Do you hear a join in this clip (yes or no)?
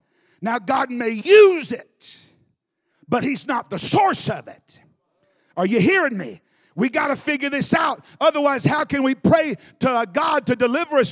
no